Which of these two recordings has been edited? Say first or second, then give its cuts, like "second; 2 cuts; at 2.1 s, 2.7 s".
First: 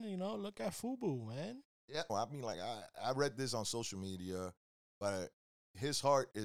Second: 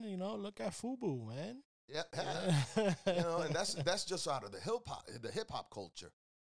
first; 1 cut; at 2.1 s